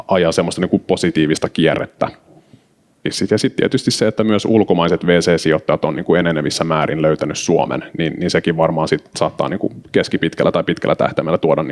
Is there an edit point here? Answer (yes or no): yes